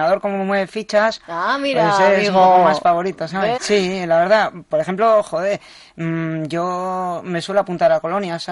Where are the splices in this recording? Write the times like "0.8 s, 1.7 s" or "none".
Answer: 3.6 s